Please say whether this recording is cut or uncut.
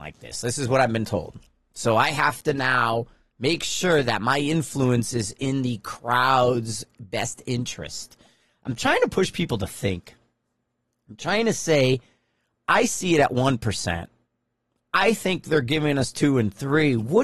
uncut